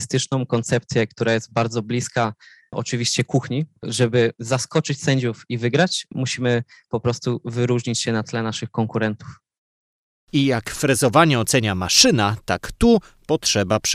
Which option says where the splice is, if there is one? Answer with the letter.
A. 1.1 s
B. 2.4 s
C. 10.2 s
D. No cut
D